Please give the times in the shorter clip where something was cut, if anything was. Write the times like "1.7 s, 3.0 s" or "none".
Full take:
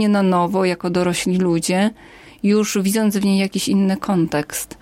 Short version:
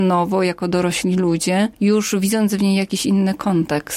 1.7 s

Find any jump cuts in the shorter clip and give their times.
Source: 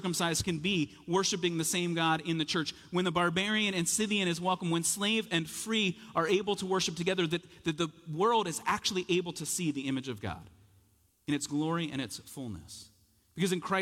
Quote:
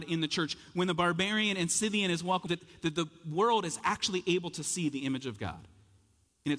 2.5 s

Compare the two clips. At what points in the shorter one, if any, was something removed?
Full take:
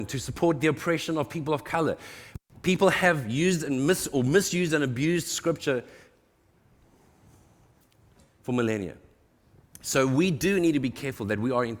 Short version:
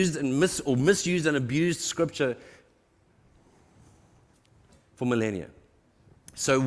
none

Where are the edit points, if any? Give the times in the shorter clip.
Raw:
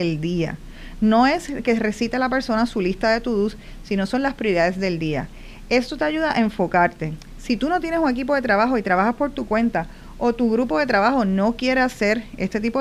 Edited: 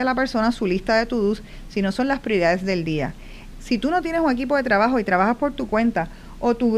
3.5 s

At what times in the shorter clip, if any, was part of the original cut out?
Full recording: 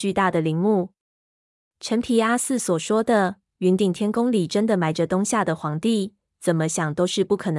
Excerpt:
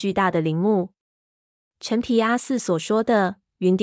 none

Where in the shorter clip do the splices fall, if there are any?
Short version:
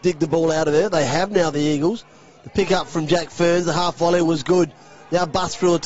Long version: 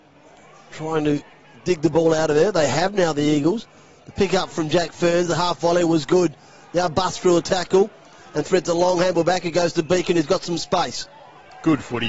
none

